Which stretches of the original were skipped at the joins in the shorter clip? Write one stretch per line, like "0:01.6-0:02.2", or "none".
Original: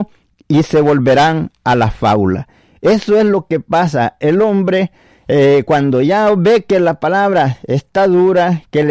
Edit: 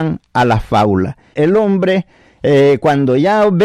0:02.6-0:04.2